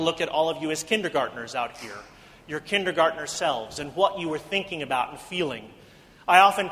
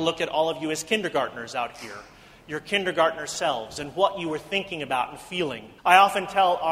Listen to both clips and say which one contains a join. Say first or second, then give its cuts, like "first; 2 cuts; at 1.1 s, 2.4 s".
second; 1 cut; at 5.8 s